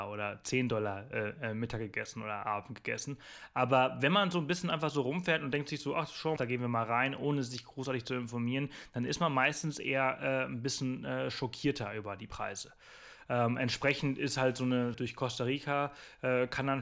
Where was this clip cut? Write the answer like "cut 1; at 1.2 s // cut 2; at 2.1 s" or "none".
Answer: cut 1; at 6.4 s // cut 2; at 14.9 s